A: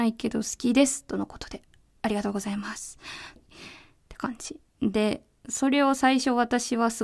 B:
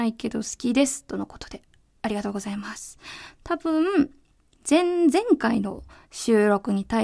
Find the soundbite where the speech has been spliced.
A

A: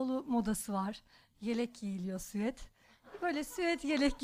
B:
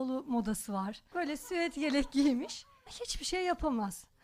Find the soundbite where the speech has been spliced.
B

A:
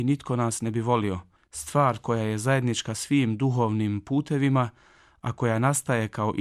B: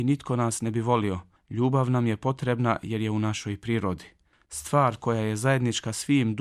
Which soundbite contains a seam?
A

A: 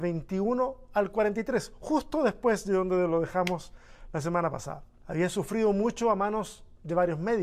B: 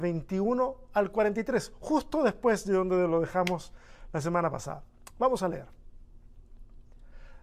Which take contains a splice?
A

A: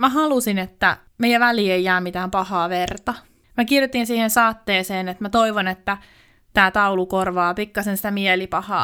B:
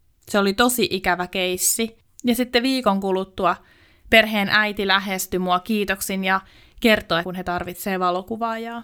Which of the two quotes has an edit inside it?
B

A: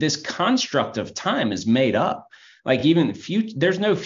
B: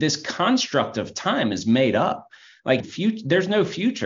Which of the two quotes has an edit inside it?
B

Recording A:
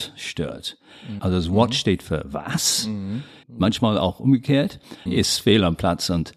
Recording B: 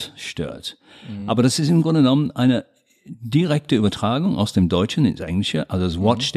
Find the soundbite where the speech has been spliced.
A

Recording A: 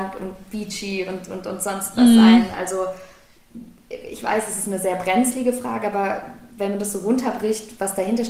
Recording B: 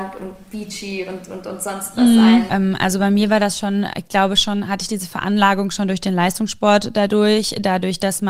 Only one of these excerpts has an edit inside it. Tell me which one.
B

